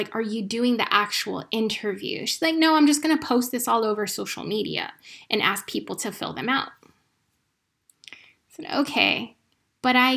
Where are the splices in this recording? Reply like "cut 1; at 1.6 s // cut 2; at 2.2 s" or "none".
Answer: none